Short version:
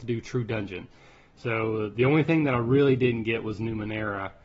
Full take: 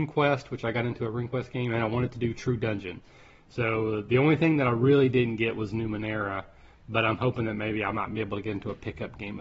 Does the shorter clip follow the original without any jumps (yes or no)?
yes